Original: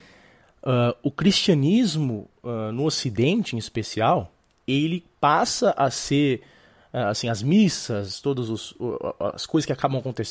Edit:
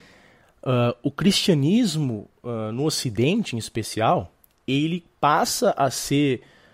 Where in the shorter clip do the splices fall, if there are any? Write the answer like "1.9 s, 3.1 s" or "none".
none

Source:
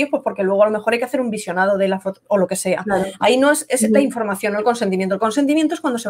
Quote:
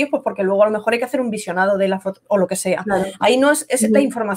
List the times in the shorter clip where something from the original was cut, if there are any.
none

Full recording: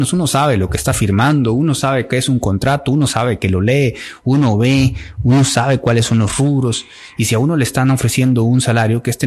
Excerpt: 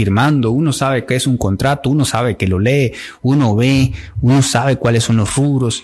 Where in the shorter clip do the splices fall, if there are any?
none

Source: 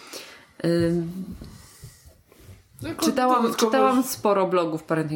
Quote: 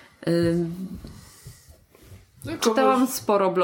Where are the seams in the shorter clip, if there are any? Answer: 2.6 s

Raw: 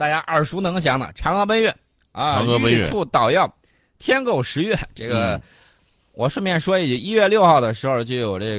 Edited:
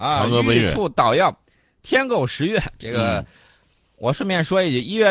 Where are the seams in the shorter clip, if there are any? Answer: none

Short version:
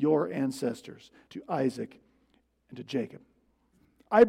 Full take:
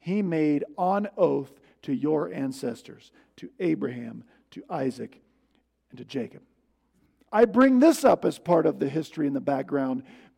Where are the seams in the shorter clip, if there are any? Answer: 1.3 s

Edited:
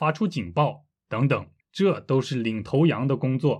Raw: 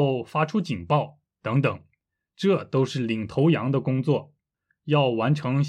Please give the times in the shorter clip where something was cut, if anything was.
1.6 s

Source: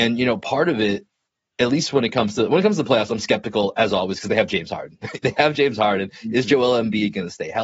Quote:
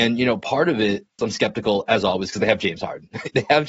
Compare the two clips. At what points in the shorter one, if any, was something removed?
1.2 s

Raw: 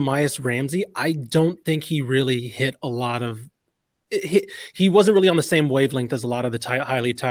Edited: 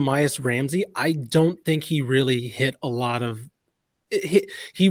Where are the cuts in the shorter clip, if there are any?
none

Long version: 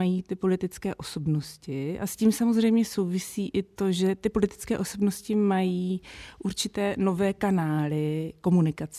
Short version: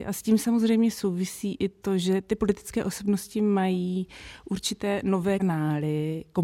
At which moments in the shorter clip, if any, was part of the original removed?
5.4 s

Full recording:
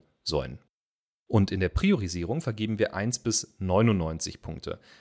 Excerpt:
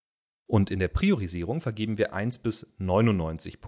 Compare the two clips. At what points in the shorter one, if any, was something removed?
none

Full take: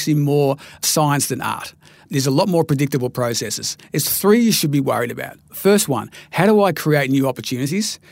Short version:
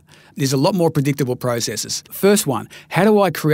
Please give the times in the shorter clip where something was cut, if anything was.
2.1 s

